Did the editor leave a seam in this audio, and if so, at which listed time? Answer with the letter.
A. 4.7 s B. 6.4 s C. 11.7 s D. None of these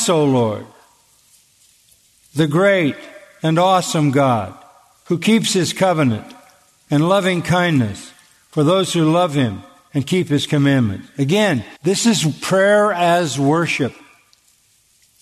C